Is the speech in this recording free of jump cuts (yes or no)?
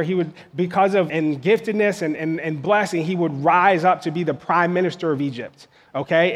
no